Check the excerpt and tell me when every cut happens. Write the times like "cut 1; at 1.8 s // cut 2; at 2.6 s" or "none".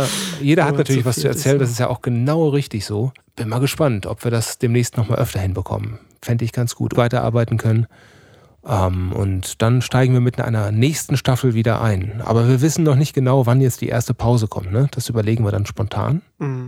cut 1; at 6.9 s